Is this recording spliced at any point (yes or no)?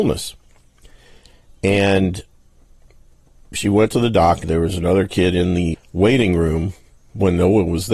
yes